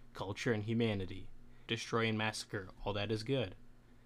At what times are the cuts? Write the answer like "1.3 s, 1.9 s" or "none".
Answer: 1.7 s